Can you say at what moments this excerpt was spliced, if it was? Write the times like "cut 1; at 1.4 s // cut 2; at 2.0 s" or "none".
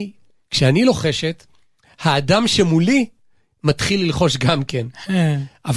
none